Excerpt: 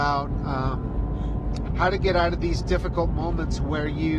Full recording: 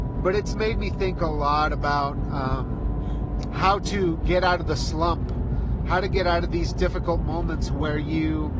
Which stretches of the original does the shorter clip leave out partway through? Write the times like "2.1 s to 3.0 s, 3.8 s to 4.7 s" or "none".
3.5 s to 5.8 s